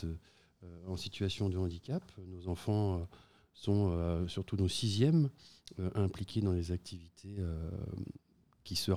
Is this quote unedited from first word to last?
yes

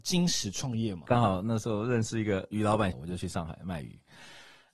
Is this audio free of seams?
no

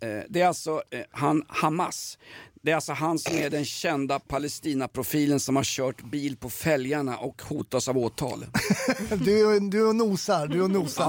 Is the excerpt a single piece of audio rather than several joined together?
yes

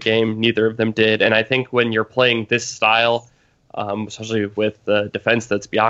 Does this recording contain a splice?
no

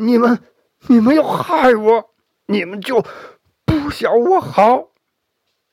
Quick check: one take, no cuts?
no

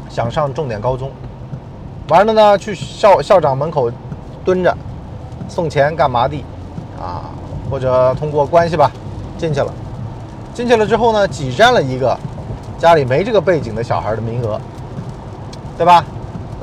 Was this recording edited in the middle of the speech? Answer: no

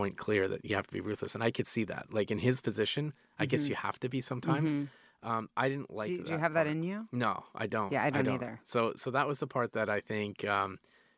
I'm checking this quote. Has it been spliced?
no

